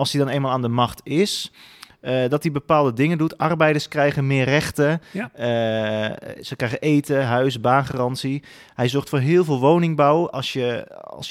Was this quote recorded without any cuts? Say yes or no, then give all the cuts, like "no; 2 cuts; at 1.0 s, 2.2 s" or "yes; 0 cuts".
yes; 0 cuts